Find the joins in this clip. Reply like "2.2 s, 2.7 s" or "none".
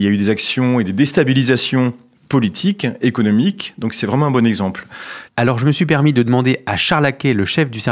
5.3 s